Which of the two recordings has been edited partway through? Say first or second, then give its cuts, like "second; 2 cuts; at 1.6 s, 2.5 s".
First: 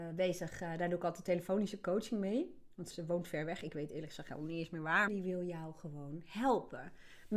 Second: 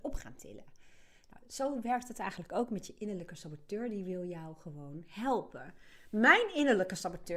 first; 2 cuts; at 2.9 s, 5.1 s